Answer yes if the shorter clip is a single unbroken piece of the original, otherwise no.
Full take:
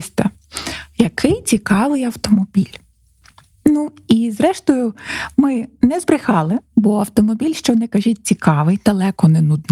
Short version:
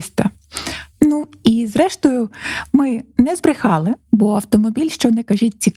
no